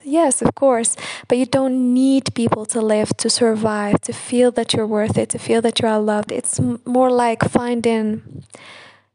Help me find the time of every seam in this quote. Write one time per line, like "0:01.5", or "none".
0:06.3